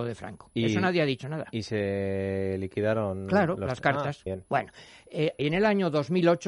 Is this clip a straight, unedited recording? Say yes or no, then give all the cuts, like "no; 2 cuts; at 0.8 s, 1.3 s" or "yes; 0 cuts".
no; 2 cuts; at 4.3 s, 5.4 s